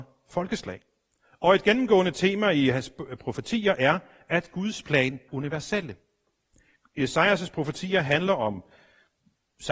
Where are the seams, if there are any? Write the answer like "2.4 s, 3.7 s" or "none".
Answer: 5.3 s